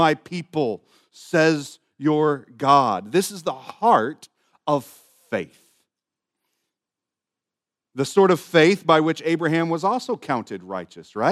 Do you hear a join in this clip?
no; 0 cuts

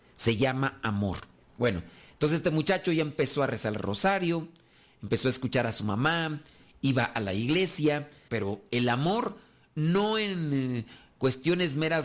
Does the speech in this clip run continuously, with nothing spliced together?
no; 2 cuts; at 1.5 s, 8.3 s

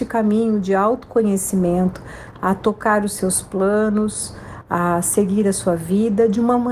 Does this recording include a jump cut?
yes; 1 cut; at 2.3 s

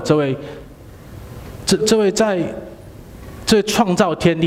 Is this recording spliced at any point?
yes; 1 cut; at 1.8 s

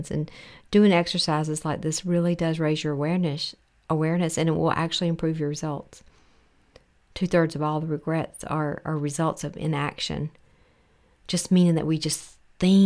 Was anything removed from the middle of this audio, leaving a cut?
no; 0 cuts

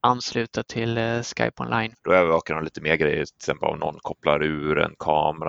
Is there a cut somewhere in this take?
yes; 1 cut; at 2.0 s

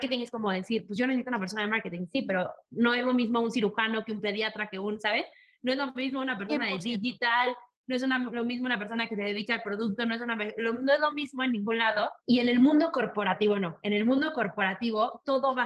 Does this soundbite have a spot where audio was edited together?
yes; 1 cut; at 12.2 s

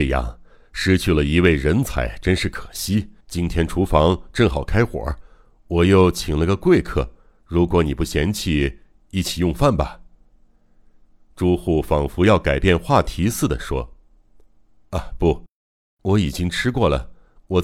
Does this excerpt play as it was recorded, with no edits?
no; 1 cut; at 3.2 s

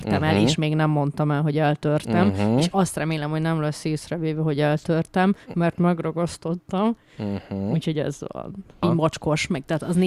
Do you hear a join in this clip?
yes; 1 cut; at 8.8 s

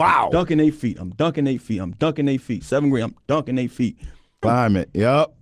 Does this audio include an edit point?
yes; 1 cut; at 4.4 s

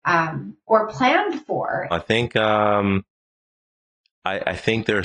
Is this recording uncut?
no; 1 cut; at 1.9 s

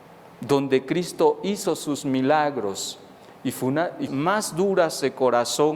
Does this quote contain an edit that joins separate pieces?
yes; 1 cut; at 4.1 s

